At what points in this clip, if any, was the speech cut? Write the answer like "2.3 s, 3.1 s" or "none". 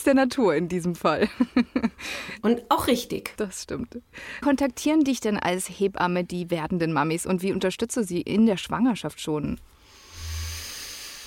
3.4 s, 4.4 s